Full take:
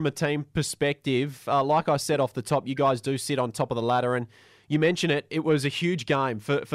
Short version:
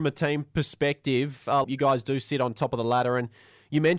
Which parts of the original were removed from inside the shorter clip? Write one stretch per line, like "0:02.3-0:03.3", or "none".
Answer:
0:01.6-0:02.6

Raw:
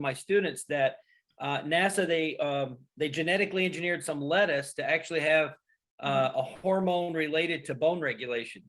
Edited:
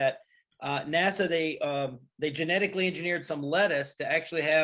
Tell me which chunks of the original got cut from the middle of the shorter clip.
none

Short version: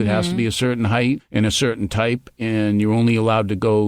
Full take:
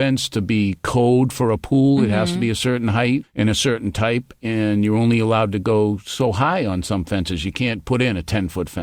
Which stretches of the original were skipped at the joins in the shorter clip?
none

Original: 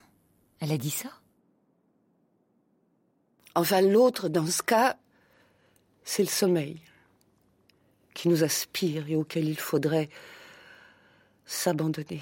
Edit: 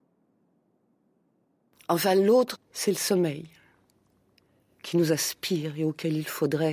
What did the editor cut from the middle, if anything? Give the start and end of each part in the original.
0:04.2-0:05.9

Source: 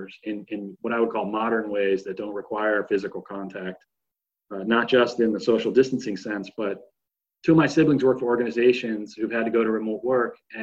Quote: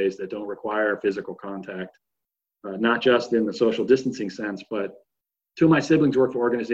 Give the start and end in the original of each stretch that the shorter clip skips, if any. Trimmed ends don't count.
none

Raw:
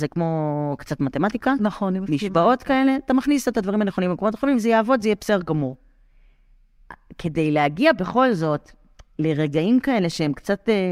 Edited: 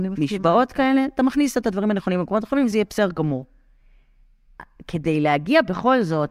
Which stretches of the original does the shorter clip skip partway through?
0:04.6-0:05.0

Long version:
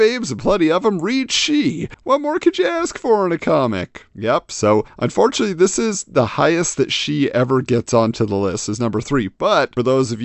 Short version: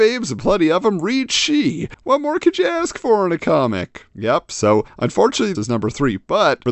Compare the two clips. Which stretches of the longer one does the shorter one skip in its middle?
0:05.5-0:08.7

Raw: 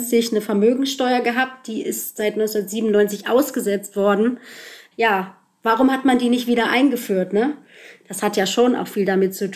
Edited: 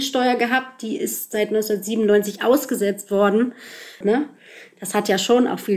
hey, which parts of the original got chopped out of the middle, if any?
0:04.9-0:07.3

